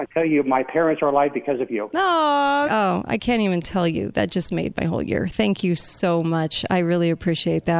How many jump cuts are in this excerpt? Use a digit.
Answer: 1